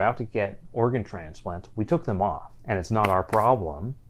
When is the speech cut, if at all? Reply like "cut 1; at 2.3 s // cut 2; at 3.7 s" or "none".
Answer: cut 1; at 2.6 s